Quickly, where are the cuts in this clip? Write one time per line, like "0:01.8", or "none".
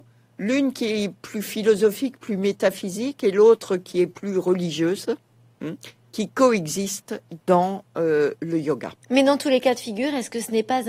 0:09.0